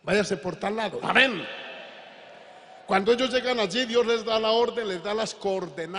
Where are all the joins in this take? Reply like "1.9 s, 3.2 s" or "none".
1.0 s